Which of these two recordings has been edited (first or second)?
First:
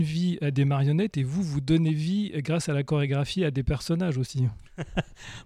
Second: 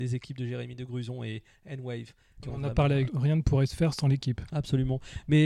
second